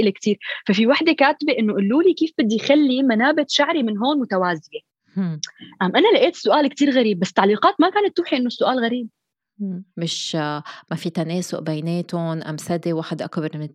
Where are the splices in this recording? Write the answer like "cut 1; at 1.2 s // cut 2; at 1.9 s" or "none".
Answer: cut 1; at 9.9 s